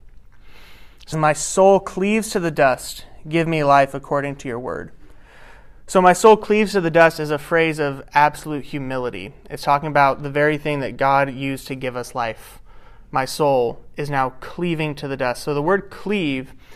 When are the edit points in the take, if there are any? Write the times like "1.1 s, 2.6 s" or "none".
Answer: 1.1 s